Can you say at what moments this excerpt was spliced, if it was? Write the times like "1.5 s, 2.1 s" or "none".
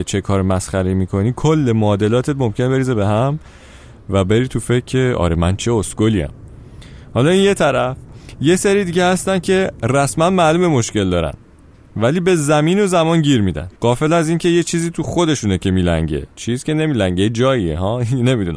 13.8 s, 16.3 s